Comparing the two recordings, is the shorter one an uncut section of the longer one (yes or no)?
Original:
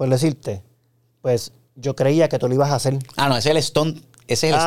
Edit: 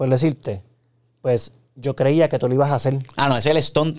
yes